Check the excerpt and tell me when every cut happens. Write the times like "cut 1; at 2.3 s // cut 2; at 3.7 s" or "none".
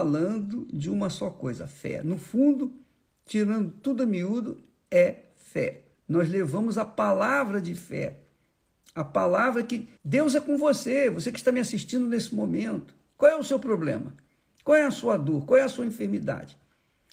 cut 1; at 5.9 s // cut 2; at 10.0 s